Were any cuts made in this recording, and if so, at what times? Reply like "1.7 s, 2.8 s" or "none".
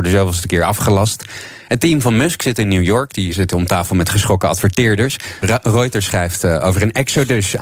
3.3 s, 5.4 s